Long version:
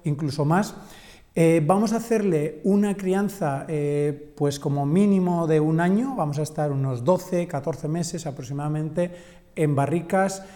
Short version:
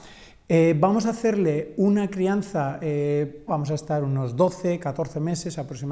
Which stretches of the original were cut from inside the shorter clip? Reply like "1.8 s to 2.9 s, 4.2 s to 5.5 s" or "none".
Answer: 4.3 s to 6.2 s